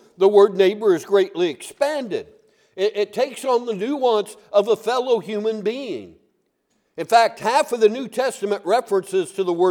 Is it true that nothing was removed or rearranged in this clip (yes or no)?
yes